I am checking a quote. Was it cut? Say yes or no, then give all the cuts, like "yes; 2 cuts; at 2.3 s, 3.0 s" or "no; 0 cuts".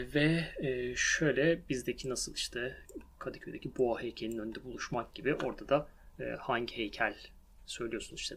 no; 0 cuts